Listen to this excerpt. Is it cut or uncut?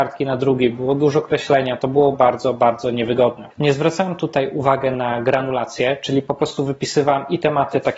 cut